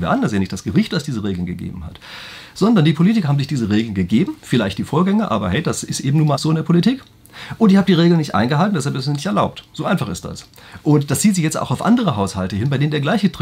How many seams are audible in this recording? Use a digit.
1